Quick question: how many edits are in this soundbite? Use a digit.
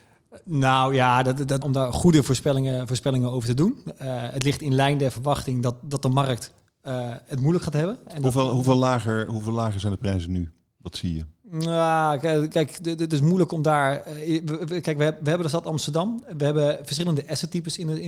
1